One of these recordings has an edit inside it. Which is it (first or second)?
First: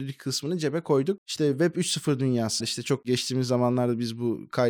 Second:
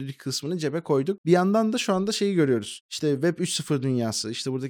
first